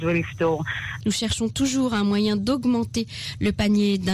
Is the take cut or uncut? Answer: cut